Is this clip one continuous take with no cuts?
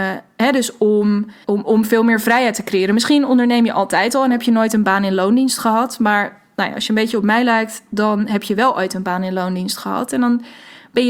no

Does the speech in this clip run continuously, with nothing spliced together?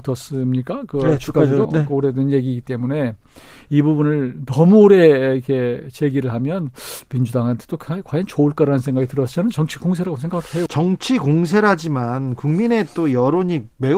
no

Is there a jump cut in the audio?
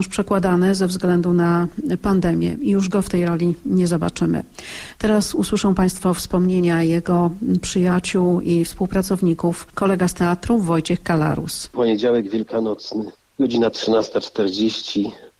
no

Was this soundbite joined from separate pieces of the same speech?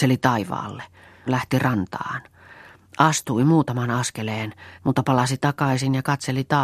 yes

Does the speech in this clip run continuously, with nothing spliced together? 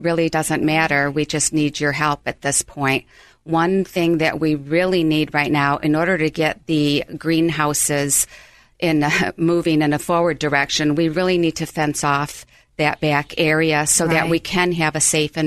yes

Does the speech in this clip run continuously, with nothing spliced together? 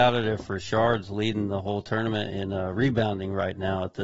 yes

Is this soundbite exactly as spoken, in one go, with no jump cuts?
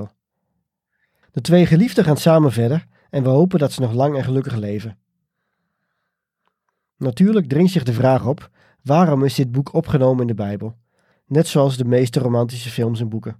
no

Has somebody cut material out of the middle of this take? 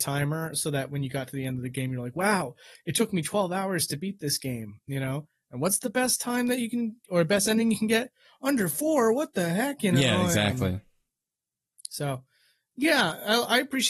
no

